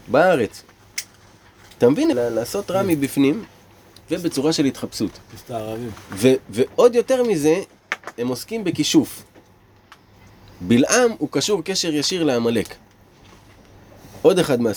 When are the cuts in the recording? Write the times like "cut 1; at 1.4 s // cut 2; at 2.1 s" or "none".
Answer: cut 1; at 2.1 s